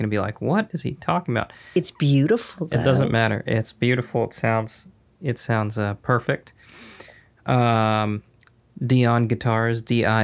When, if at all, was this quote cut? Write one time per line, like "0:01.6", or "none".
none